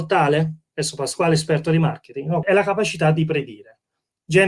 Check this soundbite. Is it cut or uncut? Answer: cut